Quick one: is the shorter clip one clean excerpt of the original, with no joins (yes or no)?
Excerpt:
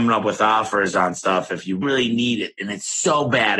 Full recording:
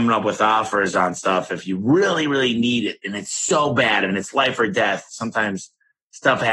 no